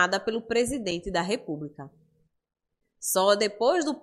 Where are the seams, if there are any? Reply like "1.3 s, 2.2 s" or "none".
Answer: 2.8 s